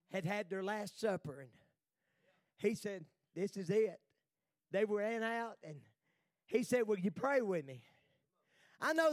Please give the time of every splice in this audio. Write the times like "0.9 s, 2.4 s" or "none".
none